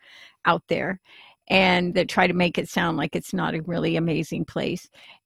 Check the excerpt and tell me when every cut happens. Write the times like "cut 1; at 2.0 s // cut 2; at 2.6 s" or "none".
none